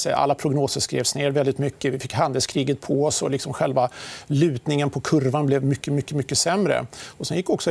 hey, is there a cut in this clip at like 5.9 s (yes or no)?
no